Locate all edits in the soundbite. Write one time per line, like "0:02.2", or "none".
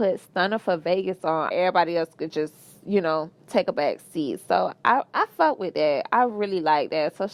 0:01.5